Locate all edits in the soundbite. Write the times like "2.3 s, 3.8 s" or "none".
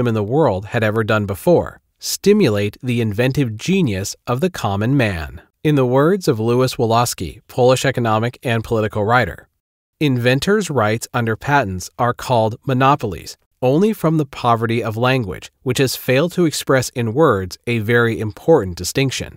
5.5 s